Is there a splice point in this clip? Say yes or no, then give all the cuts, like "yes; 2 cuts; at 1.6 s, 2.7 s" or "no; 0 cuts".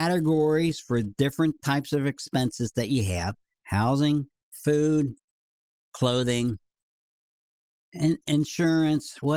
yes; 1 cut; at 4.3 s